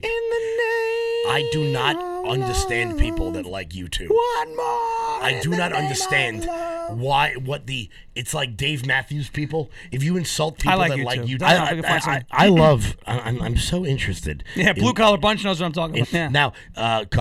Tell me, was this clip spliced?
yes; 2 cuts; at 11.4 s, 16.0 s

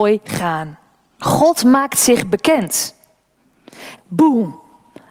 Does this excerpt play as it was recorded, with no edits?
no; 2 cuts; at 1.2 s, 4.0 s

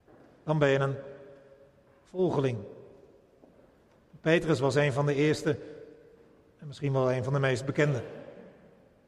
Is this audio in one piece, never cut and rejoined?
yes; 0 cuts

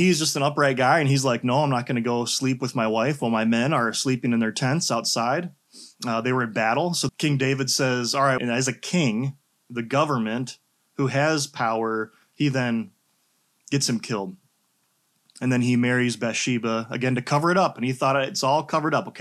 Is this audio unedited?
no; 3 cuts; at 5.9 s, 7.1 s, 8.4 s

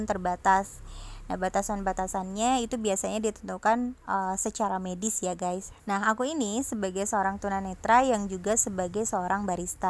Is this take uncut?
no; 1 cut; at 5.8 s

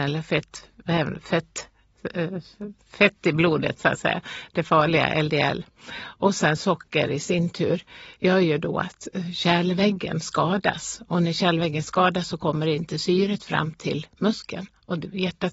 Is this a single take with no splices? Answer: yes; 0 cuts

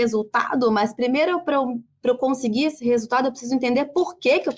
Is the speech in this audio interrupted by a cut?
no; 0 cuts

